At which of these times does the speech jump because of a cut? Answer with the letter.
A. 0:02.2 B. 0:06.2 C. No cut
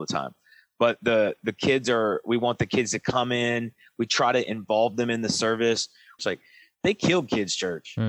B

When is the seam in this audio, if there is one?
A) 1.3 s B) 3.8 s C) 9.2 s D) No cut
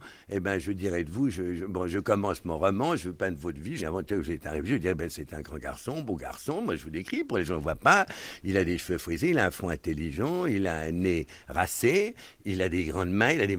B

